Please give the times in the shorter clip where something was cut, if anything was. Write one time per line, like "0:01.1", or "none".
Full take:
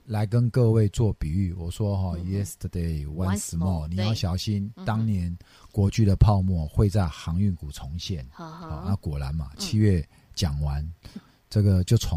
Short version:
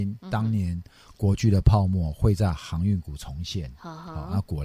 none